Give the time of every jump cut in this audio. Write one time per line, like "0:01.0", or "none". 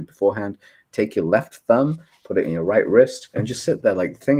0:03.3

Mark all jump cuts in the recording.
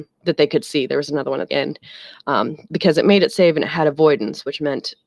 0:01.5

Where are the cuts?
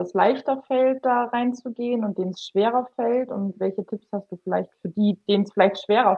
none

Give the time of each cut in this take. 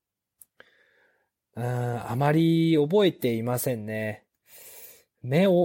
none

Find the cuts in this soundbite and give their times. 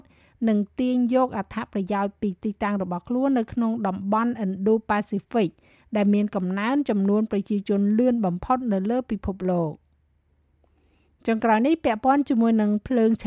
none

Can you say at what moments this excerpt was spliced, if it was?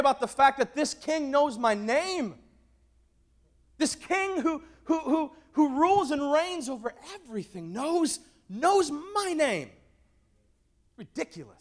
none

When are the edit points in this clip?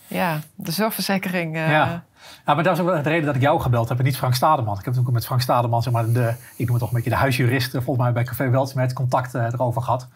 none

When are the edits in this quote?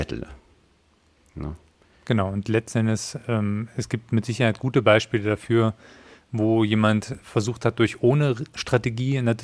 none

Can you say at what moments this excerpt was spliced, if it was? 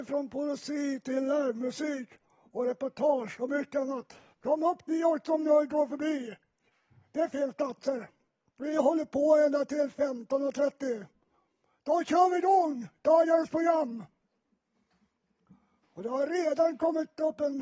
0:04.3
0:15.8

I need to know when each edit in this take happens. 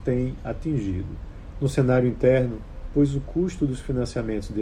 0:01.5
0:02.9

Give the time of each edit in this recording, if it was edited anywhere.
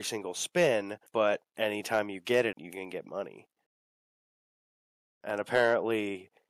0:01.1
0:02.5

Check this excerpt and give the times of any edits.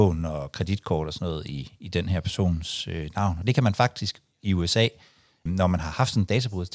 0:05.5

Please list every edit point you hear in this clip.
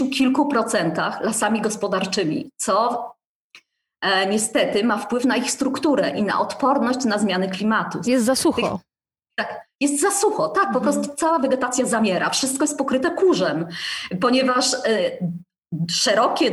0:08.0

